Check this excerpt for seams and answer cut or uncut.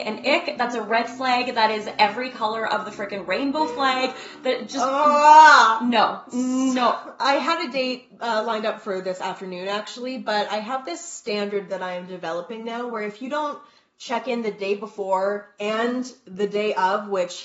uncut